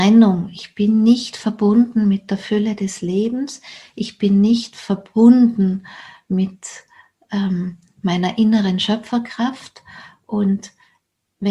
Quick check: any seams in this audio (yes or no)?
no